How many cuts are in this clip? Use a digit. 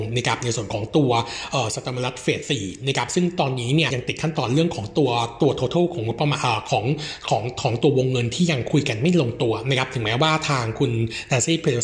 2